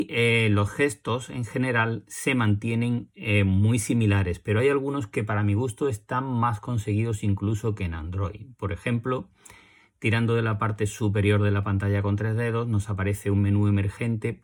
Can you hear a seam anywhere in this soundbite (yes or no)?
no